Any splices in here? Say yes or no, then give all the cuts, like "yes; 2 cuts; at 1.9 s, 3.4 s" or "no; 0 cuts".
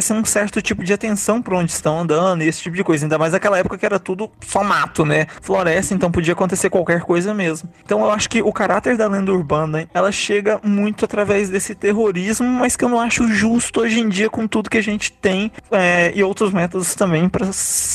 yes; 2 cuts; at 9.9 s, 13.2 s